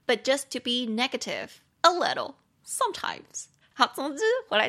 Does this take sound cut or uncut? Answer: cut